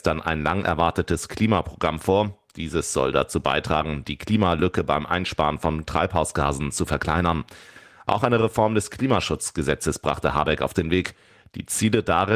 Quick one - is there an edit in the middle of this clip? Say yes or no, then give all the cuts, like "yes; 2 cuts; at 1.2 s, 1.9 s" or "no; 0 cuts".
no; 0 cuts